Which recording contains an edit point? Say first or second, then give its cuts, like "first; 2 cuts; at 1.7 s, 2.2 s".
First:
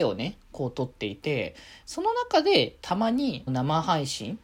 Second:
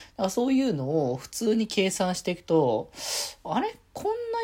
first; 2 cuts; at 1.8 s, 3.5 s